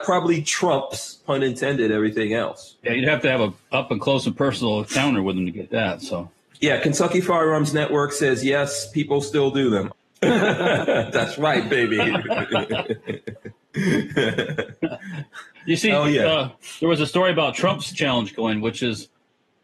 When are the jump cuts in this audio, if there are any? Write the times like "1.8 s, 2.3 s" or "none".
9.9 s